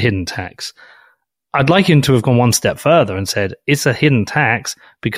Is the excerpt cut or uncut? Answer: uncut